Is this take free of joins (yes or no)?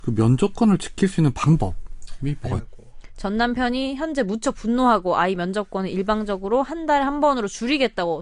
no